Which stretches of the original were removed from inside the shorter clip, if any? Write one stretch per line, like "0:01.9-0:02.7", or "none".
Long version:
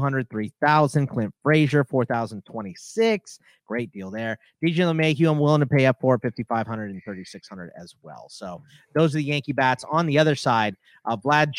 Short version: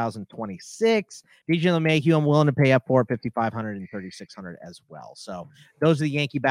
0:03.6-0:04.6